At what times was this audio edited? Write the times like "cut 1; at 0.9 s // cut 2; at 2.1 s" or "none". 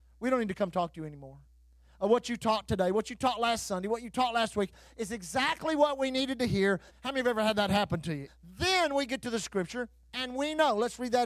cut 1; at 6.9 s // cut 2; at 8.3 s